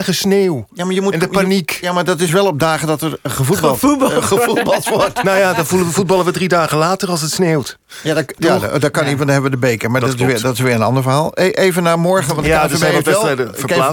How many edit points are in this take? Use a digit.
0